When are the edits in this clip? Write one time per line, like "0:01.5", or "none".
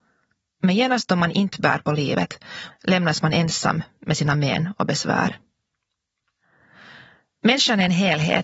0:02.7